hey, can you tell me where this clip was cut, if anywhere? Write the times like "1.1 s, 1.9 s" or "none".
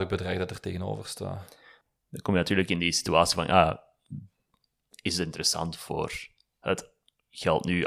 none